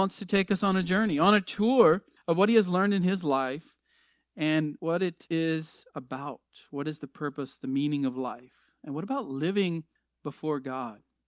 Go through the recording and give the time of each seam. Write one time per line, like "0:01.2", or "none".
none